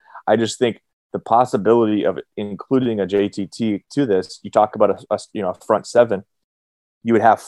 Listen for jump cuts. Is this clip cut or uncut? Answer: uncut